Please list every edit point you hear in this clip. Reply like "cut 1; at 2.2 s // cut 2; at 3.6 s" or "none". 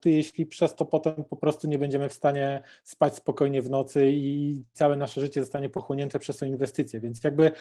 none